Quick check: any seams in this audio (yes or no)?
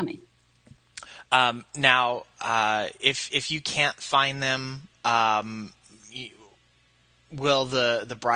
no